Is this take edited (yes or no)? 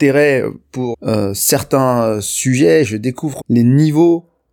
yes